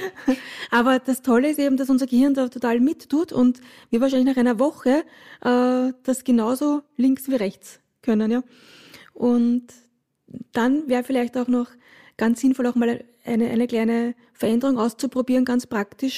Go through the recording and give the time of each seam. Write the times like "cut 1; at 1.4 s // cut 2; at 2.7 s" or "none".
none

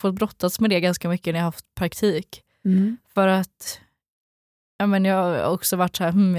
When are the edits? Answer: none

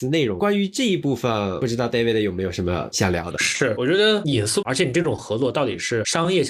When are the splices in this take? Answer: cut 1; at 4.6 s

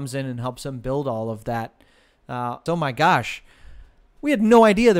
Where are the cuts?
cut 1; at 2.7 s

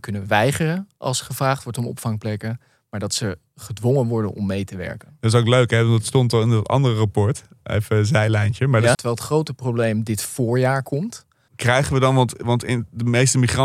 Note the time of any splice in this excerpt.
cut 1; at 8.9 s // cut 2; at 11.5 s

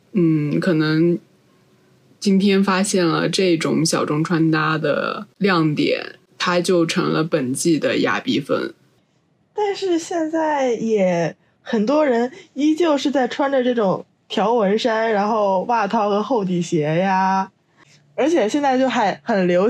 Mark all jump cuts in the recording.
none

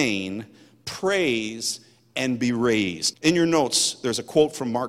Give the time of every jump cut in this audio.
cut 1; at 3.1 s

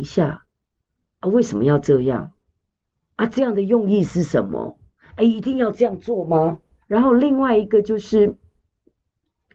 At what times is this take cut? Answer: cut 1; at 6.8 s

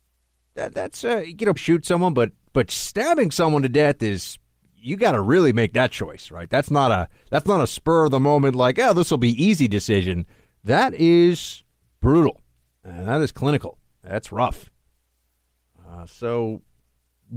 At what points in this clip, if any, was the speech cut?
cut 1; at 1.6 s

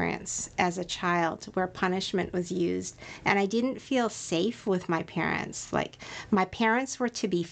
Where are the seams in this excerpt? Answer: none

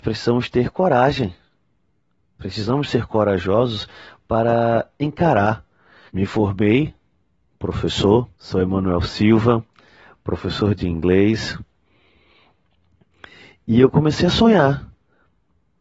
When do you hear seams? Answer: cut 1; at 6.1 s // cut 2; at 8.3 s

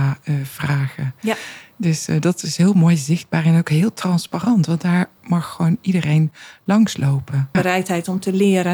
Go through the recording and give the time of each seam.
cut 1; at 7.5 s

